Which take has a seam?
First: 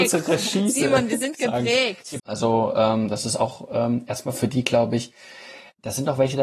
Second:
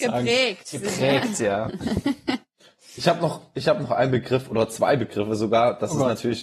first; 1 cut; at 2.2 s

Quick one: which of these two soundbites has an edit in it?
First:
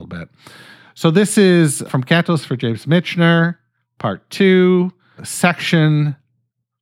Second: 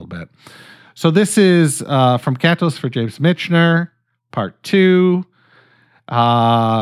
first; 2 cuts; at 1.9 s, 5.2 s

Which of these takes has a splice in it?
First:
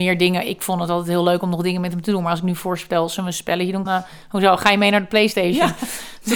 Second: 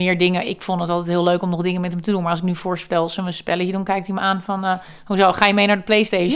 first; 1 cut; at 3.9 s

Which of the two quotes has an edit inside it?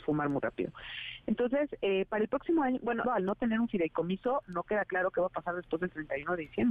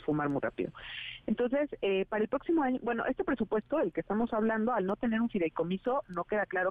first; 1 cut; at 3.0 s

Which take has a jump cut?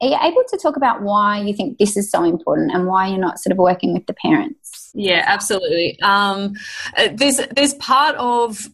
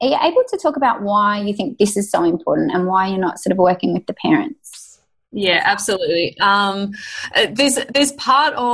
first; 1 cut; at 4.9 s

